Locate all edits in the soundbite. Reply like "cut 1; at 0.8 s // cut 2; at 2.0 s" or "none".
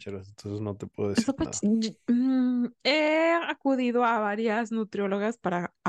cut 1; at 1.6 s